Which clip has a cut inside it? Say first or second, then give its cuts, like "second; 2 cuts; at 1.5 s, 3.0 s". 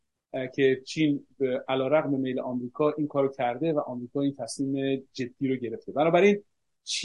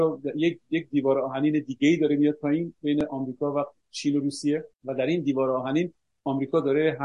second; 1 cut; at 4.7 s